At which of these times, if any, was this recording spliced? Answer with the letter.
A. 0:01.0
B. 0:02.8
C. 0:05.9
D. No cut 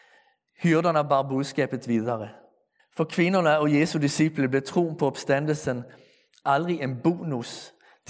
B